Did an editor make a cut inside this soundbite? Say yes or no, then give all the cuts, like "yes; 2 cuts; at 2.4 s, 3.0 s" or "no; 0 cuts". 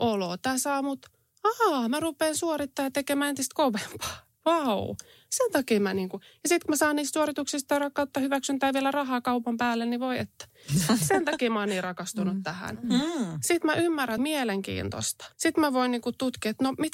yes; 2 cuts; at 14.2 s, 15.3 s